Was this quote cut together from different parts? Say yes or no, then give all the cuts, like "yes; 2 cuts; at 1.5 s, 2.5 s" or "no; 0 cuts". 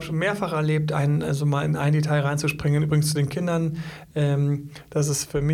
no; 0 cuts